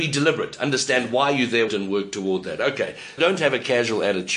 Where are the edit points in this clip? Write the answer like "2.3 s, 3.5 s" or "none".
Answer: 1.7 s, 3.2 s

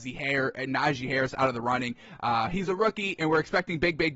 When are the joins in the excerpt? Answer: none

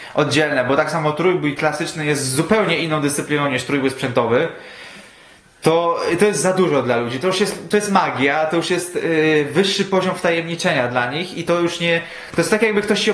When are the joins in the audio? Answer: none

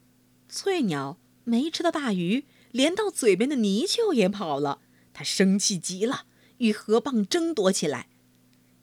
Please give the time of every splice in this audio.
none

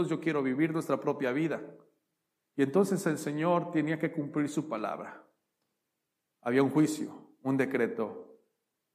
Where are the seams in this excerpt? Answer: none

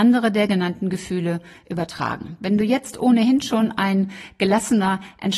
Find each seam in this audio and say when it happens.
none

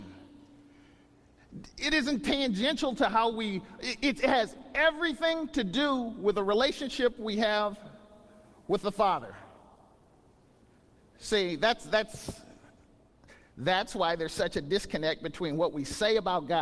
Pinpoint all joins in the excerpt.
none

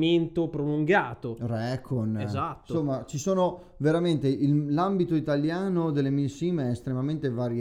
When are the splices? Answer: none

